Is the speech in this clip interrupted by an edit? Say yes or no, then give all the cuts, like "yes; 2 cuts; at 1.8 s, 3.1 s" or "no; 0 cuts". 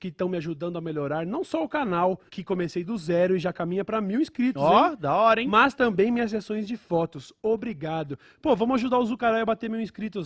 yes; 1 cut; at 2.3 s